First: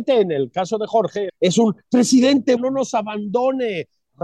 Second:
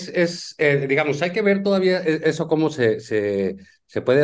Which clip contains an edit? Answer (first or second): first